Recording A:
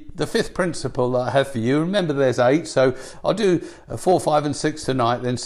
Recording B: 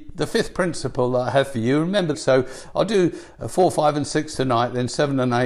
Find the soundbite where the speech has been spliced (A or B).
B